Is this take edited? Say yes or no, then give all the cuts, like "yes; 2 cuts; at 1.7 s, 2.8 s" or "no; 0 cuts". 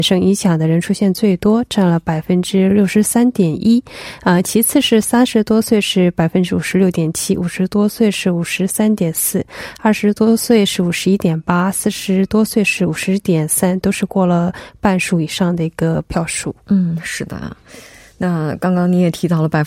no; 0 cuts